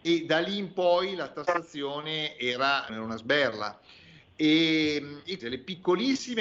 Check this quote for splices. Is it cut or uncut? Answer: cut